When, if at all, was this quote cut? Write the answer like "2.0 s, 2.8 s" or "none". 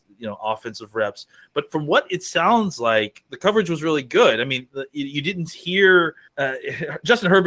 6.2 s